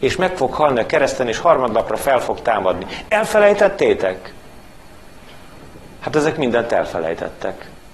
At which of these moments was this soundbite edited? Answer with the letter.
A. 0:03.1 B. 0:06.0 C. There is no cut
B